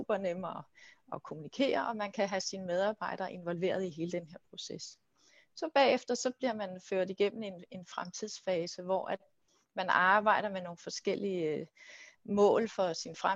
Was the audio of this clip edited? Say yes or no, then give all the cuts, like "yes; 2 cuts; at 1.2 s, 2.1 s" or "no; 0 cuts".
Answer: no; 0 cuts